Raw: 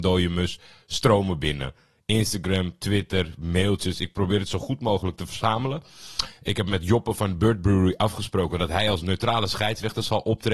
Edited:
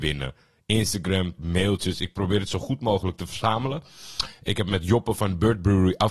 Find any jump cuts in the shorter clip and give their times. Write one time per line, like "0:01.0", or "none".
0:01.4